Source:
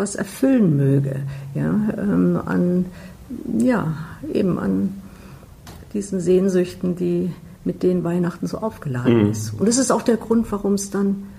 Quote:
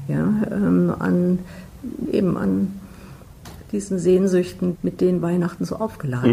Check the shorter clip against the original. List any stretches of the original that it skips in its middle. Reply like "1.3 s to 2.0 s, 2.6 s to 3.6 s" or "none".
3.5 s to 4.3 s, 7.0 s to 7.6 s